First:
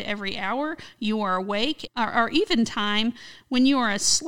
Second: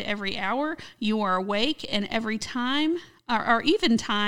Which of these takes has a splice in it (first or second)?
first